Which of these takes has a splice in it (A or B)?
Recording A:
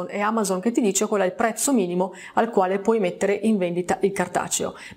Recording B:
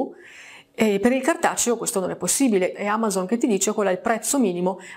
B